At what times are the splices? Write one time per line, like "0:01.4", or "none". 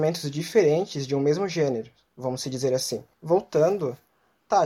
0:03.1